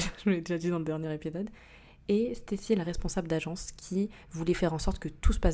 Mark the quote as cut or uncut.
uncut